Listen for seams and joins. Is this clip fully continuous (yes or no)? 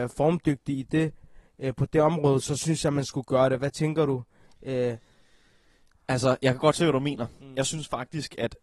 yes